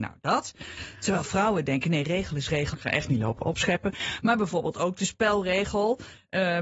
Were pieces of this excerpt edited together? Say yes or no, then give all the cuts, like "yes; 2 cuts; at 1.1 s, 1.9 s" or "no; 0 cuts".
yes; 1 cut; at 2.7 s